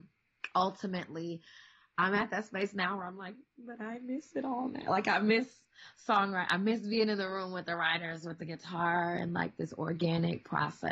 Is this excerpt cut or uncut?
uncut